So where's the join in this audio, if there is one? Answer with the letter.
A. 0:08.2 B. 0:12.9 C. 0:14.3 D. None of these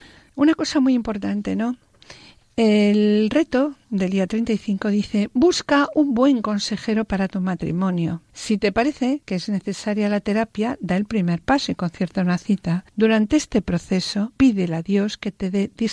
D